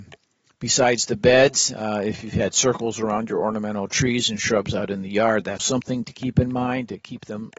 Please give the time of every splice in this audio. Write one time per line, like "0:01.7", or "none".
0:05.6